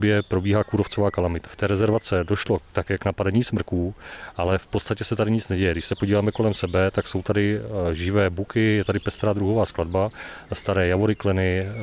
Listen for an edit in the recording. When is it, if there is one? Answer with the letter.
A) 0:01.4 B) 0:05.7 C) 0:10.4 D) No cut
A